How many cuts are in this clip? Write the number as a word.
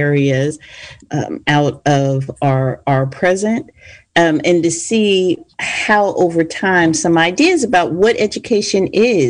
one